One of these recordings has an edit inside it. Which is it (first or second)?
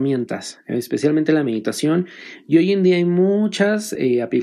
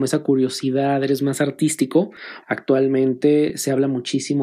second